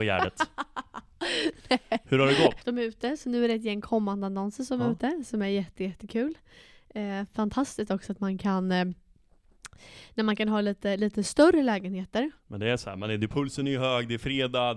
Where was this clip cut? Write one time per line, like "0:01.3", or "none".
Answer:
0:02.6
0:12.3